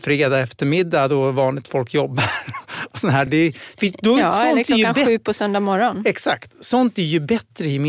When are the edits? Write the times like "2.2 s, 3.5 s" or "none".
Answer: none